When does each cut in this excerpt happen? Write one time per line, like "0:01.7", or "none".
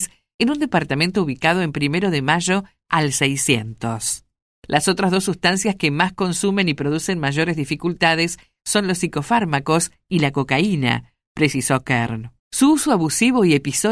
0:04.5
0:12.4